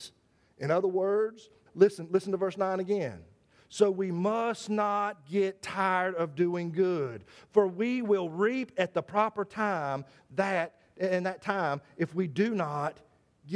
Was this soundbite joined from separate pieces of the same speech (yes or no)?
yes